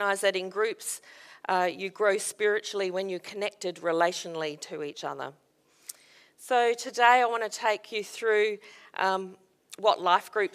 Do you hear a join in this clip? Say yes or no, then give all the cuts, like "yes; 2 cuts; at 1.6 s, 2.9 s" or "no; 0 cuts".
no; 0 cuts